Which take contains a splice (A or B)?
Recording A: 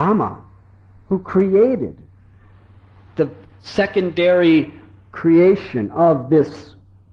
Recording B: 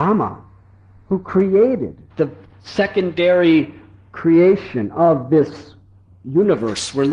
B